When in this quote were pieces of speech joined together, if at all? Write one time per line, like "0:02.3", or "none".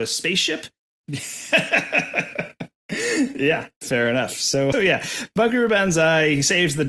0:01.0
0:04.7